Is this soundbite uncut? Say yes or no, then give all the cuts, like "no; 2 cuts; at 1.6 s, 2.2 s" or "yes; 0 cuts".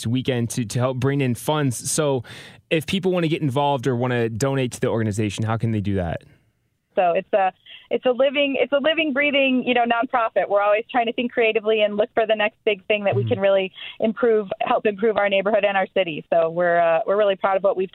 no; 1 cut; at 6.9 s